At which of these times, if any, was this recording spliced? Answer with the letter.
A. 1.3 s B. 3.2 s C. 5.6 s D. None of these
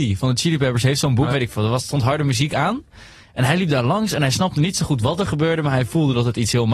A